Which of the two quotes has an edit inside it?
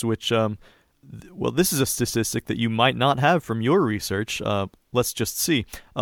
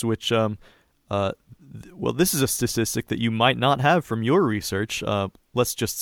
first; 1 cut; at 1.0 s

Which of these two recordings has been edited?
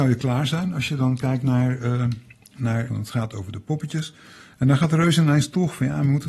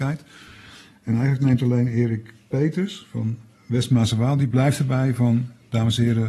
first; 1 cut; at 2.9 s

